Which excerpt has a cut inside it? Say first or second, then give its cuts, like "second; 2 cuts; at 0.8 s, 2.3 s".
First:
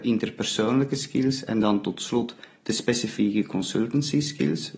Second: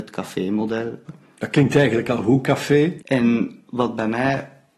second; 2 cuts; at 1.1 s, 3.0 s